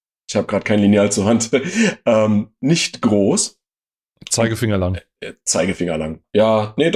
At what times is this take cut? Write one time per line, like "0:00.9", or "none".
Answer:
none